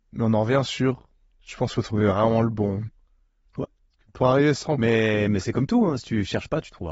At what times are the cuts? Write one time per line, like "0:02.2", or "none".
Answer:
none